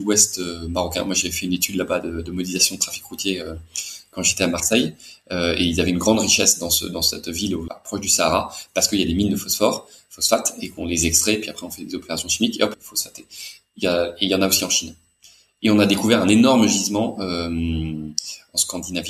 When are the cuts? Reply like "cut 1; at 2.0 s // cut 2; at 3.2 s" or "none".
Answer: cut 1; at 7.7 s // cut 2; at 12.7 s